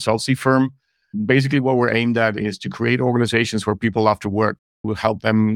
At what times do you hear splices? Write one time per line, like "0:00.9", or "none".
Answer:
none